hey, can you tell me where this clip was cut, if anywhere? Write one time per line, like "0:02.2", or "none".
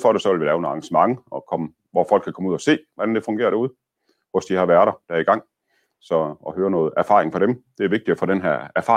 none